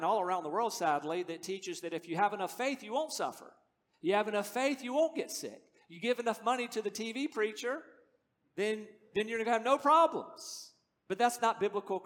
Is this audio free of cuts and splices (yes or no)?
yes